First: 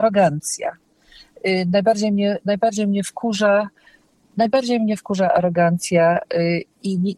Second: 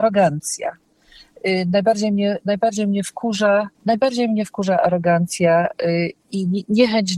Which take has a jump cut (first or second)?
second